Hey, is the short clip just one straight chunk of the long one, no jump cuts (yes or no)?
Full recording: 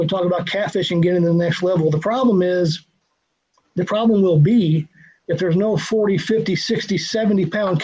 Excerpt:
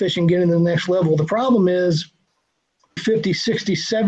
no